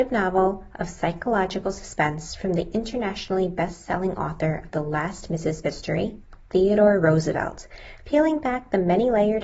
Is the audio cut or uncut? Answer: cut